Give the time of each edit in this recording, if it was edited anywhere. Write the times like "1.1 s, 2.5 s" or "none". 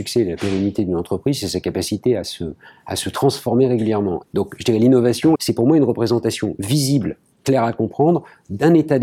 4.2 s, 5.3 s